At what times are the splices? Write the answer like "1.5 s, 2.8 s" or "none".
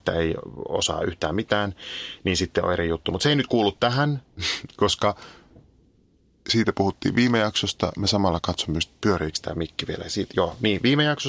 none